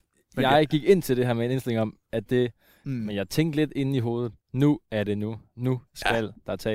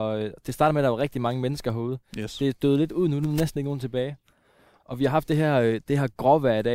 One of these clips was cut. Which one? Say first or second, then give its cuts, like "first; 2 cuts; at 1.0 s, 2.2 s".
first; 2 cuts; at 2.8 s, 4.4 s